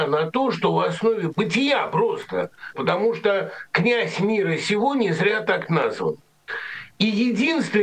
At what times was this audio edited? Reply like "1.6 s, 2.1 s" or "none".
1.3 s, 2.7 s